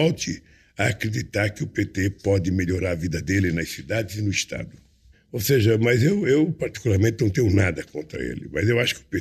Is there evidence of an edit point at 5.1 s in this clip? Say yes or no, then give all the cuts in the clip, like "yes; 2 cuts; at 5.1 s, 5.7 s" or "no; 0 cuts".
yes; 1 cut; at 5.1 s